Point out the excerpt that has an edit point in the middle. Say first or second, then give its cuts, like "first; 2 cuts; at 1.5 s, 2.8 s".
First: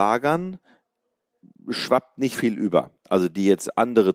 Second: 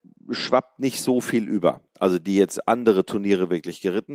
first; 1 cut; at 2.3 s